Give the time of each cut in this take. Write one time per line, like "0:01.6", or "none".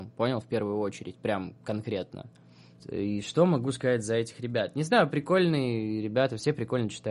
0:02.8